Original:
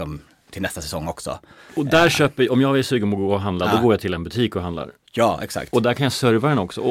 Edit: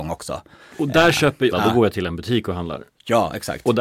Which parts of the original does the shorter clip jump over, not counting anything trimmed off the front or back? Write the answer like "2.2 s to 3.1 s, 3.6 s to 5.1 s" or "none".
2.5 s to 3.6 s